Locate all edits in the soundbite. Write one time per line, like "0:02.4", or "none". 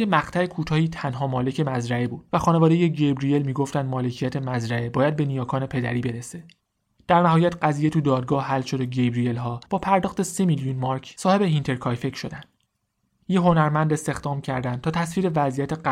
0:13.2